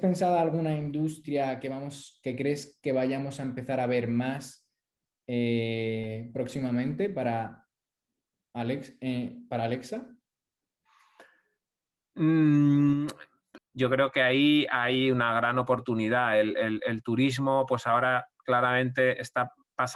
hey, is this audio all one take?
no; 1 cut; at 13.6 s

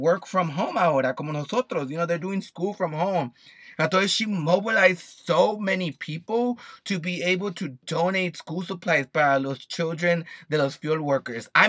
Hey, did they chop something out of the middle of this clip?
no; 0 cuts

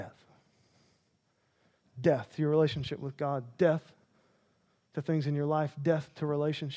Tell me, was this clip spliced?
no; 0 cuts

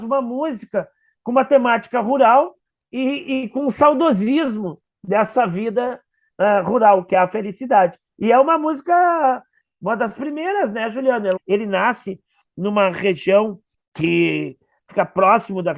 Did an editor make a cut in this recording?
yes; 1 cut; at 11.4 s

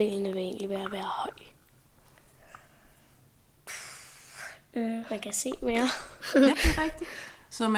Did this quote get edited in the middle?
yes; 1 cut; at 6.5 s

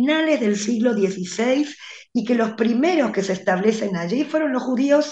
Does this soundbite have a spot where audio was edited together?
no; 0 cuts

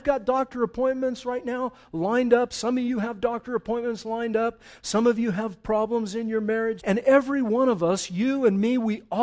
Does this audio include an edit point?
yes; 1 cut; at 6.8 s

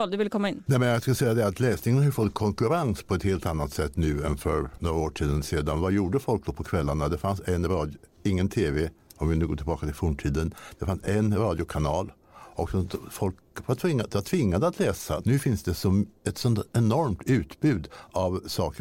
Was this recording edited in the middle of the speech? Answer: yes; 1 cut; at 15.2 s

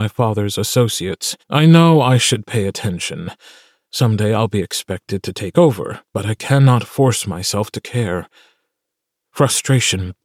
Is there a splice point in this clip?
yes; 2 cuts; at 1.4 s, 6.0 s

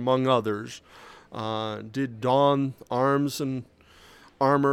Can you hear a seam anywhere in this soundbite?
no; 0 cuts

